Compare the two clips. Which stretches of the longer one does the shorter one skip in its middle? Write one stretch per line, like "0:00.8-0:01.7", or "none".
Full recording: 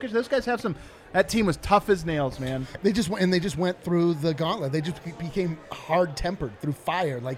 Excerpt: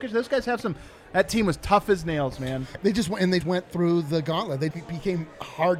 0:03.4-0:03.5
0:04.8-0:05.0